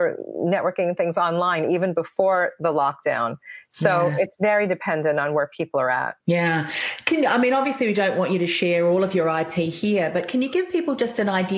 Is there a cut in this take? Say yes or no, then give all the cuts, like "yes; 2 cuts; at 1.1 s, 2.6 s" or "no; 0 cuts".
yes; 1 cut; at 6.2 s